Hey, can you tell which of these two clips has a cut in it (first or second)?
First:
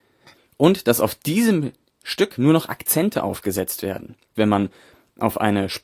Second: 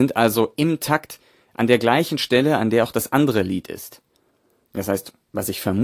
first